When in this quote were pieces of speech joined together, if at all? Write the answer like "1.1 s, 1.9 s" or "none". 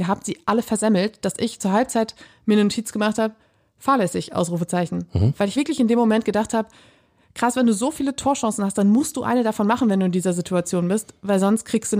none